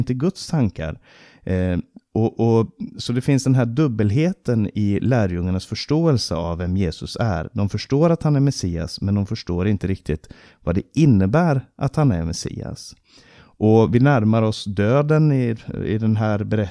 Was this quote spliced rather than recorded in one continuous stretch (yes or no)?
no